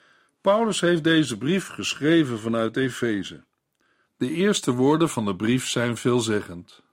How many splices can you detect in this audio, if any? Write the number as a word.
one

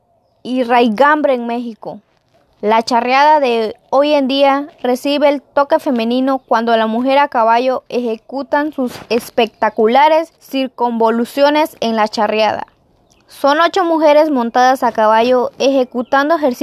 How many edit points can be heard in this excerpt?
two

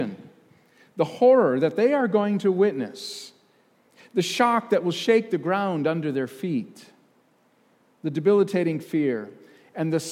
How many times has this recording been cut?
zero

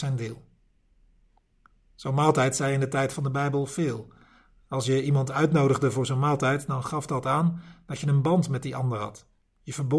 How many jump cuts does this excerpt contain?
zero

